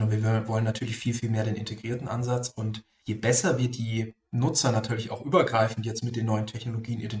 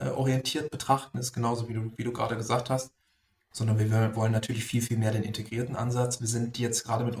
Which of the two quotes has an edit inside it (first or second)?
second